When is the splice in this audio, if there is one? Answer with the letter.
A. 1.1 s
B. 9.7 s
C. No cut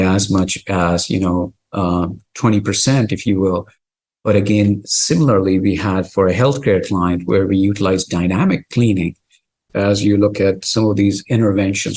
B